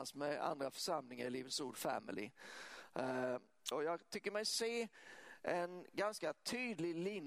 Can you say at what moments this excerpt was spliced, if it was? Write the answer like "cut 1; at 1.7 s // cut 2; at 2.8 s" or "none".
cut 1; at 3.7 s